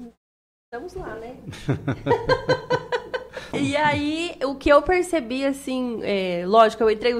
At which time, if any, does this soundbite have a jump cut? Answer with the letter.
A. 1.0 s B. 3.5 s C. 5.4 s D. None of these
B